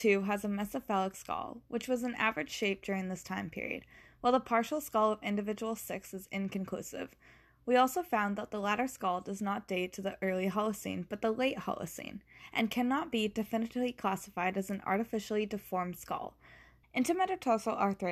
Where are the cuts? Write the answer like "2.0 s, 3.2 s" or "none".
16.8 s